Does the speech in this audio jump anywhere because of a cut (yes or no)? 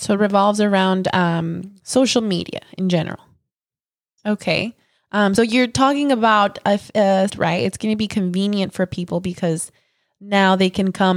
yes